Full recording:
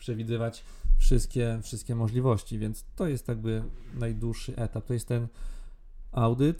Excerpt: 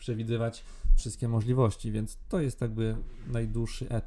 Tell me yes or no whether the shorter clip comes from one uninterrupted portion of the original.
no